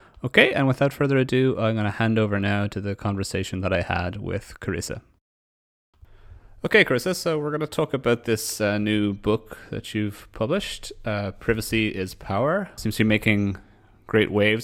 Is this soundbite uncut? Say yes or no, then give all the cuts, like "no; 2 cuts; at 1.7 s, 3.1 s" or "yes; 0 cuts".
no; 1 cut; at 12.8 s